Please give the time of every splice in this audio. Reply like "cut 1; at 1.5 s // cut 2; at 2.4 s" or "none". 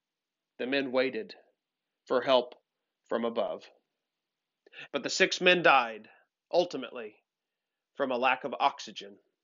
cut 1; at 4.9 s